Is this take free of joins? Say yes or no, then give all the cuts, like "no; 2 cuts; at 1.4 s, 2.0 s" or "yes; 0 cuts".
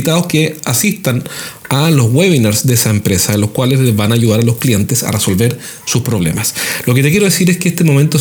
yes; 0 cuts